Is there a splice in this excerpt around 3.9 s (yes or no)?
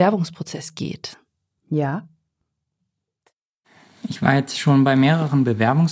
no